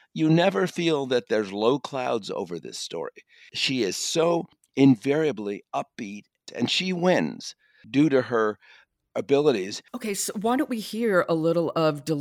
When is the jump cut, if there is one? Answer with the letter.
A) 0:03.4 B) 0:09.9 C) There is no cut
B